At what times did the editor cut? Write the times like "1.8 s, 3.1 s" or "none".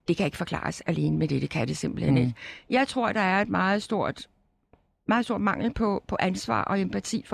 none

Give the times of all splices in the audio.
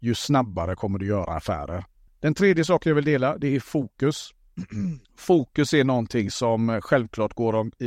2.1 s, 5.0 s

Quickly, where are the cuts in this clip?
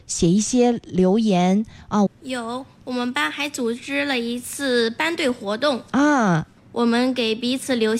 2.1 s, 6.6 s

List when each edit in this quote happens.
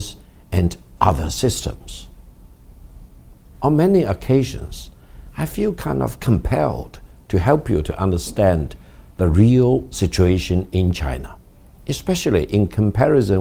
3.6 s

